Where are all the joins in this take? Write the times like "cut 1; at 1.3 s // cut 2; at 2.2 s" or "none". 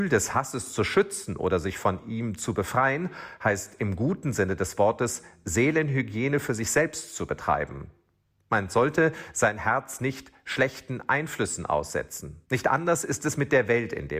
cut 1; at 12.4 s